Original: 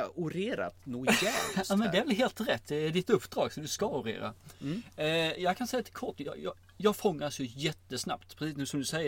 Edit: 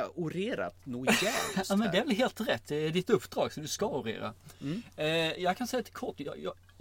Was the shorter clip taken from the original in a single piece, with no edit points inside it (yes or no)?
yes